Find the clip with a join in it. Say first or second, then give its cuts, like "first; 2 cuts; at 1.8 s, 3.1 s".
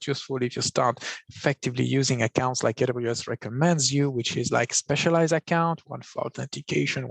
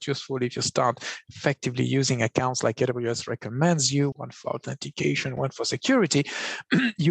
second; 2 cuts; at 4.1 s, 5.4 s